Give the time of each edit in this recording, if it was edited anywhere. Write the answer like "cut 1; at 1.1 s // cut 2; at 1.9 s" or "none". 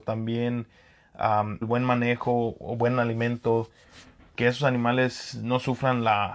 cut 1; at 1.6 s